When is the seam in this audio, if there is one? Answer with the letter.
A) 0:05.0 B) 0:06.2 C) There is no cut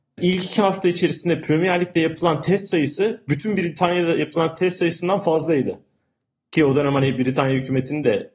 C